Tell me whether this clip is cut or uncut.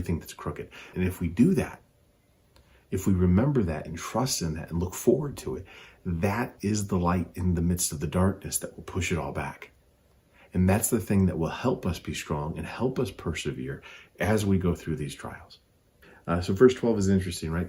cut